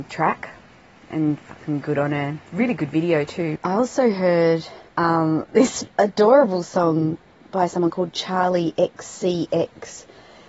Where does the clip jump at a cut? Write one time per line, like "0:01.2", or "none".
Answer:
0:03.6
0:04.9